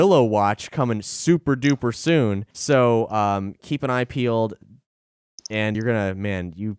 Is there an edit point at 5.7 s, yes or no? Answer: yes